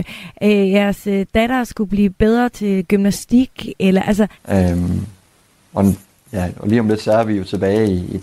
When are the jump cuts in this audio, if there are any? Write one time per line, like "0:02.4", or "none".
0:04.4